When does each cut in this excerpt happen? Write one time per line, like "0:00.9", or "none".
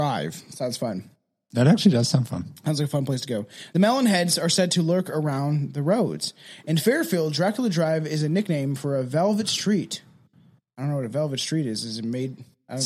none